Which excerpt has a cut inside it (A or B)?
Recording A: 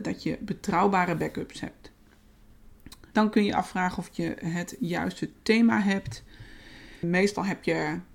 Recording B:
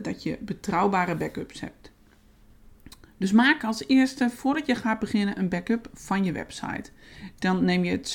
A